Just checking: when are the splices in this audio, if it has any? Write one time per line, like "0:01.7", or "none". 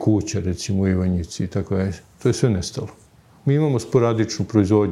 none